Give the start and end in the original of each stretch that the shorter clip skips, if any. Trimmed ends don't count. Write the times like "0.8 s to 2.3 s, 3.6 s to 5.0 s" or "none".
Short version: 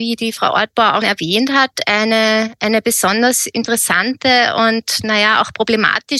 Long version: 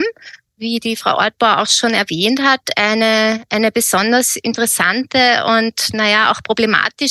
1.7 s to 1.9 s